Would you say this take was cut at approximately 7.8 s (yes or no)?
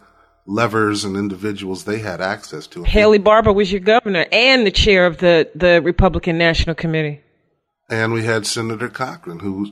no